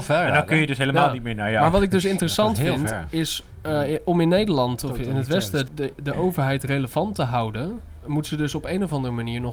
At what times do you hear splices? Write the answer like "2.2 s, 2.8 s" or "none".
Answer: 5.7 s